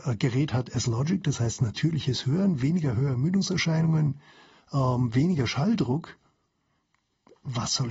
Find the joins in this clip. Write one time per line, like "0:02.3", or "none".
none